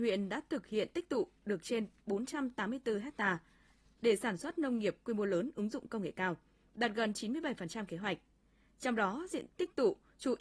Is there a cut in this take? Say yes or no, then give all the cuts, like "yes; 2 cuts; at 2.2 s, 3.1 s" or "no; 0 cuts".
yes; 1 cut; at 9.5 s